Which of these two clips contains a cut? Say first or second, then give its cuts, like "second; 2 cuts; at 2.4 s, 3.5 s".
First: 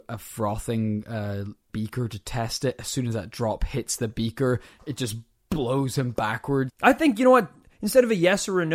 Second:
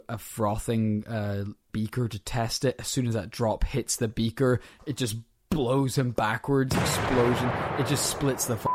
first; 1 cut; at 6.7 s